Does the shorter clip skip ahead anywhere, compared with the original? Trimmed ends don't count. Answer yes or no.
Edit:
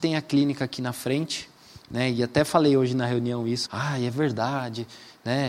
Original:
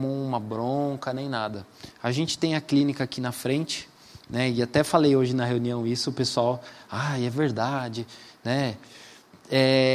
yes